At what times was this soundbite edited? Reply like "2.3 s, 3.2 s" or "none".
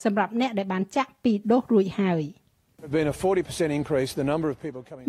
none